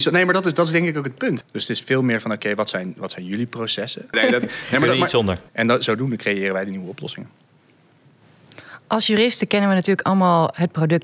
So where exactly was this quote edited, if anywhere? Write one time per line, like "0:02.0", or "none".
0:01.4
0:04.1
0:05.5